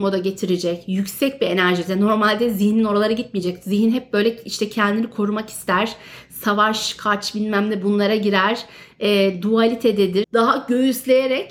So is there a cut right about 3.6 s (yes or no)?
no